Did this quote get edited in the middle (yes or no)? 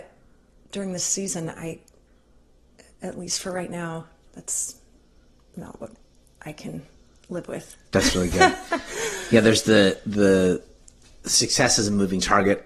no